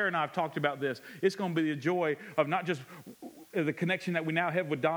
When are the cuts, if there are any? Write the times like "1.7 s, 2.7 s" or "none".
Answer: none

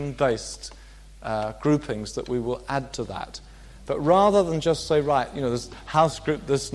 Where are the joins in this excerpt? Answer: none

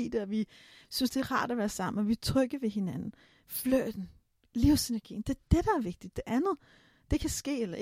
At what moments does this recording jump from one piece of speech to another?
none

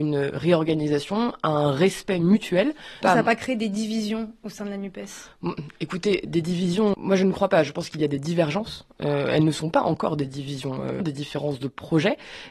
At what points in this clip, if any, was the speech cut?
3.0 s, 6.9 s, 11.0 s

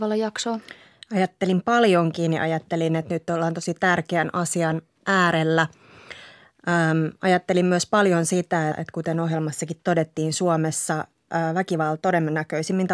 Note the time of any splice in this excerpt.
8.7 s, 12.0 s

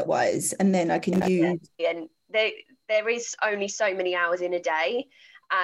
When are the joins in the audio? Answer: 1.8 s

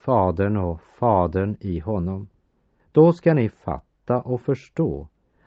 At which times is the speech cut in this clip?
2.8 s

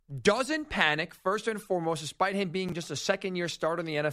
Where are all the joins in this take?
none

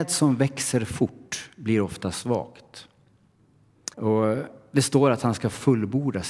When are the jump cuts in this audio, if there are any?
3.9 s

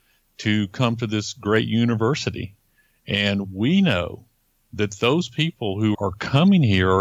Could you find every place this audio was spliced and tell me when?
5.9 s

